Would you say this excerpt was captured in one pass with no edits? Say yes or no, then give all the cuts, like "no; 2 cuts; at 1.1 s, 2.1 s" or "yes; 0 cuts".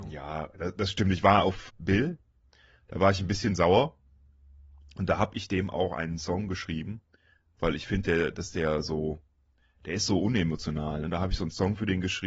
no; 1 cut; at 1.7 s